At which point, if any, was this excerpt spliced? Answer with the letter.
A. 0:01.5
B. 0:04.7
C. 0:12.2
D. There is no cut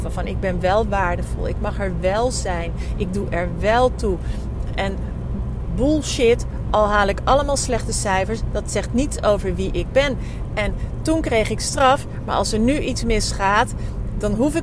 D